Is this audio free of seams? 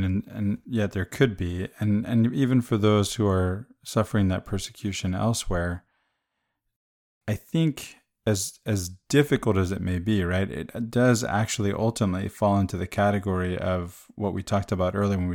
yes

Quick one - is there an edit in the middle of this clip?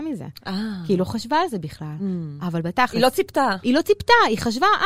no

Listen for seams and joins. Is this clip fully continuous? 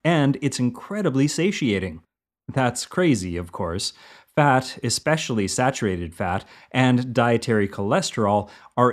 no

